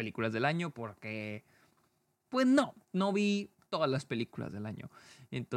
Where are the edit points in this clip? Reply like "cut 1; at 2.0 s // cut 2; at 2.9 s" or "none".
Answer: none